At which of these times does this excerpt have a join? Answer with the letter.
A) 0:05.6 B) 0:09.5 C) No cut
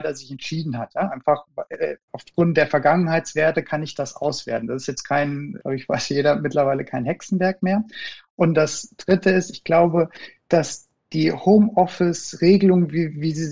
A